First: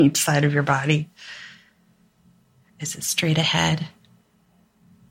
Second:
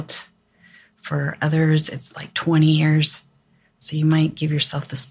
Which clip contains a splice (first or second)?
first